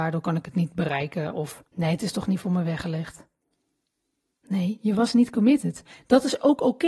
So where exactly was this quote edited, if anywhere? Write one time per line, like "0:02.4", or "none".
0:01.7

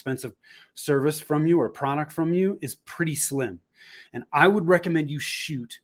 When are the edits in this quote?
0:04.0

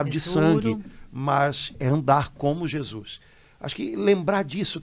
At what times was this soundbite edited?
0:01.7

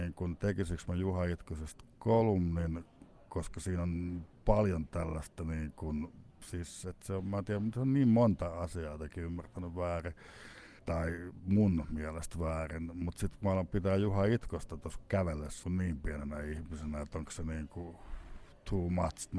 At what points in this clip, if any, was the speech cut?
0:15.6

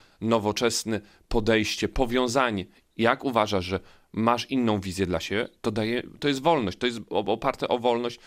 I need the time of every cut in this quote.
0:02.8

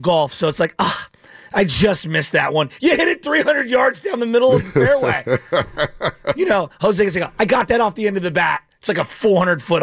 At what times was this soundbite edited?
none

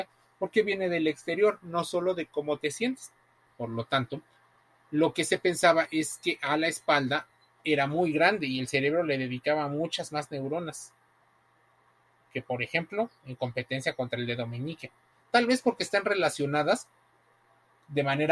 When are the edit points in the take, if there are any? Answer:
0:03.5
0:15.1

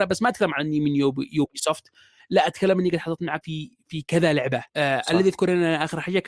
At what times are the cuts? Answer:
0:03.4
0:04.7

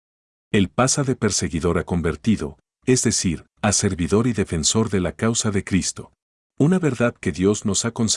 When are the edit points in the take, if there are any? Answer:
0:06.4

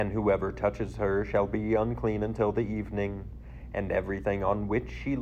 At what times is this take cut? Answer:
none

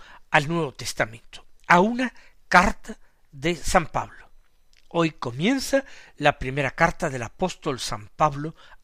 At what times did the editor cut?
none

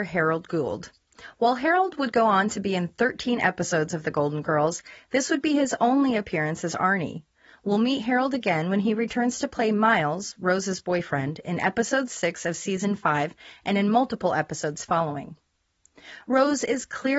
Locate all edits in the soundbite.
none

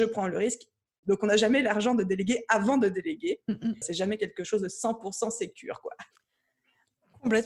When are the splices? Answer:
0:01.0
0:03.8

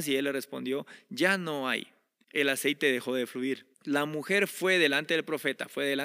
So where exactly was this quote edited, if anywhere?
0:02.2
0:03.7

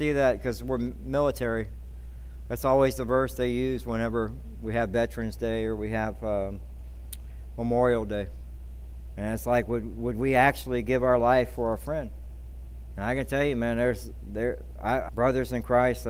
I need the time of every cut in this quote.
0:15.1

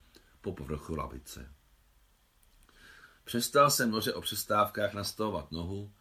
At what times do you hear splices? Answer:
none

